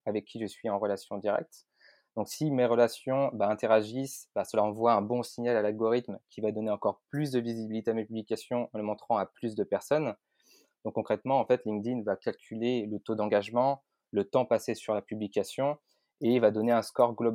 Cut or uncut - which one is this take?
uncut